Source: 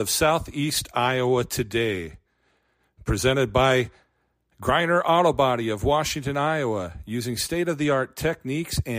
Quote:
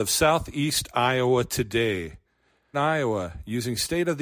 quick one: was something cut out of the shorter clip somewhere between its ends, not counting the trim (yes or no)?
yes